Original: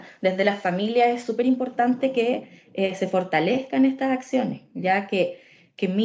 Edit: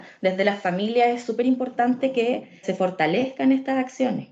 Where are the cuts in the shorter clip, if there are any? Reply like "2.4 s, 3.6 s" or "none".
2.6 s